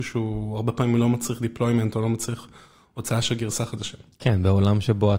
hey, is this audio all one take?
yes; 0 cuts

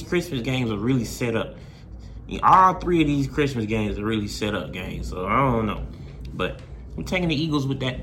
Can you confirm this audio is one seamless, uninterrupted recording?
yes; 0 cuts

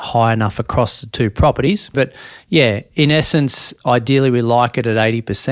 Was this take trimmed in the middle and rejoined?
yes; 1 cut; at 1.9 s

